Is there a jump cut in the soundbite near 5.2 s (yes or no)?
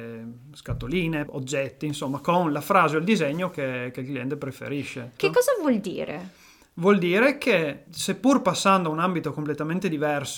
yes